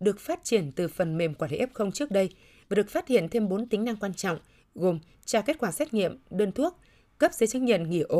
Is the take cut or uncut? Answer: uncut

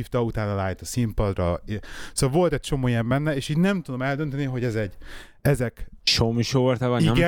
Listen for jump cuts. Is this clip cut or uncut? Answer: uncut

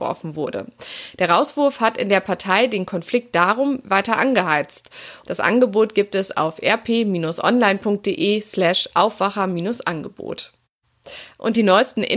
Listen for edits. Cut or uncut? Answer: cut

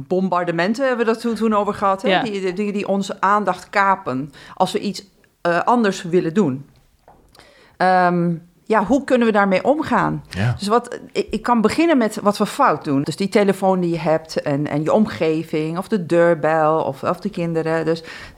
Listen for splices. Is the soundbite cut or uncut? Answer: cut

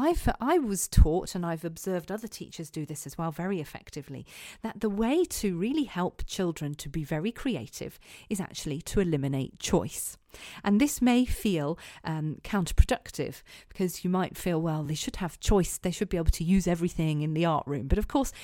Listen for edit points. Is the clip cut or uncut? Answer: uncut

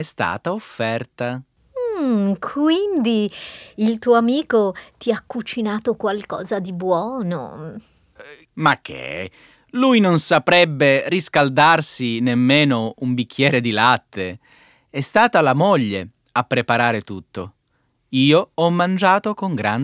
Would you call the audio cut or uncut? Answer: cut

